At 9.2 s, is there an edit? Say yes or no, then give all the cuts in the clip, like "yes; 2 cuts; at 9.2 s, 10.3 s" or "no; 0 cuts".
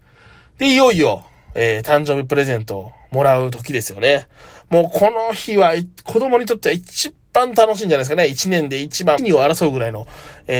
yes; 1 cut; at 9.2 s